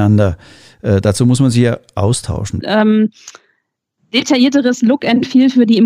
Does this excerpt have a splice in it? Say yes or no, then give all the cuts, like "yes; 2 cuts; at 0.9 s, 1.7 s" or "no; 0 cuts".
yes; 1 cut; at 2.6 s